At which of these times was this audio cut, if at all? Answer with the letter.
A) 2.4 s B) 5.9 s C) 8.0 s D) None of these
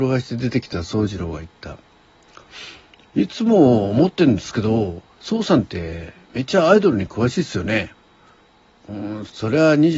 C